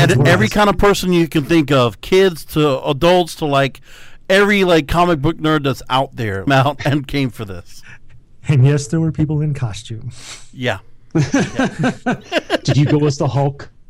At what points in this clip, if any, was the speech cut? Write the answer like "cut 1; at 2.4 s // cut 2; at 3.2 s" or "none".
cut 1; at 6.5 s